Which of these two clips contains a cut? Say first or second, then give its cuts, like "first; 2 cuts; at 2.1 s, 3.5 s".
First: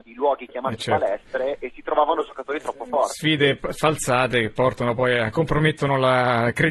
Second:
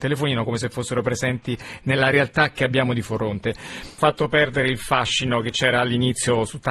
second; 1 cut; at 4.0 s